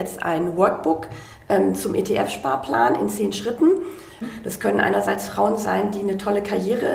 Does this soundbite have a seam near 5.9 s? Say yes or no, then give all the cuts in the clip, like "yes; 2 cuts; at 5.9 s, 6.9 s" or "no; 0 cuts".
no; 1 cut; at 4.2 s